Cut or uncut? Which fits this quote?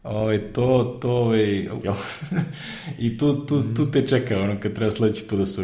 cut